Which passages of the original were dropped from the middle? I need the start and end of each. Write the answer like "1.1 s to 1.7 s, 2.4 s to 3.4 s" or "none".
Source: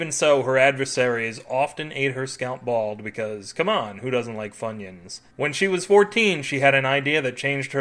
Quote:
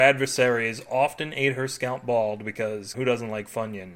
3.5 s to 4.0 s